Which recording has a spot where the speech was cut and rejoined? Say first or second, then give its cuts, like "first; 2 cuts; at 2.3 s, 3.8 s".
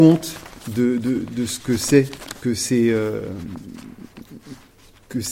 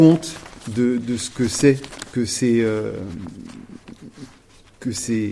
second; 1 cut; at 1.0 s